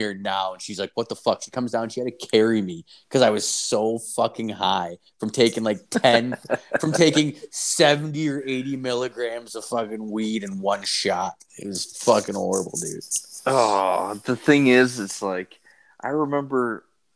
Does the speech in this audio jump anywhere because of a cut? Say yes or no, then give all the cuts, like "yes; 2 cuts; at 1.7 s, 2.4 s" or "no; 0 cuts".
no; 0 cuts